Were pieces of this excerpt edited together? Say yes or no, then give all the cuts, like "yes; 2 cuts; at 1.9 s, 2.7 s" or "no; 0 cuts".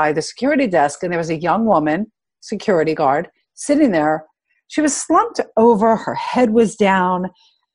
no; 0 cuts